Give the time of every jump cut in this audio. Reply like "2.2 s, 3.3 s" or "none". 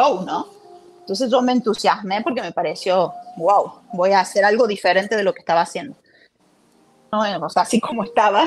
7.1 s